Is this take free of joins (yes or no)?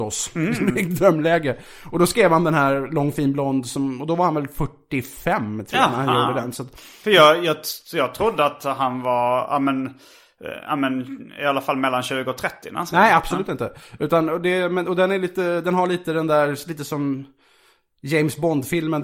yes